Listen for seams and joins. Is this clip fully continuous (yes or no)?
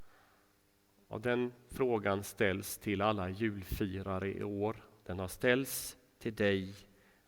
yes